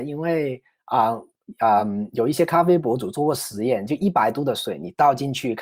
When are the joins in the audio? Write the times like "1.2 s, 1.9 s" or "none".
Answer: none